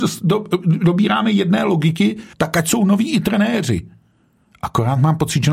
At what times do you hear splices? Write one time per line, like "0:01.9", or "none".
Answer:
0:02.3